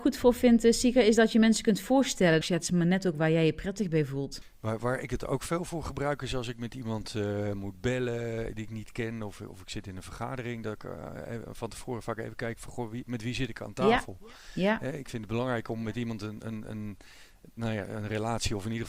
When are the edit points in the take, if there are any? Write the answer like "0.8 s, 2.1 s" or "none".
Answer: 2.4 s